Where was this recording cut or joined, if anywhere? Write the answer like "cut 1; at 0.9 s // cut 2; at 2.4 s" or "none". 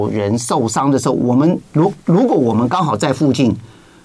cut 1; at 1.7 s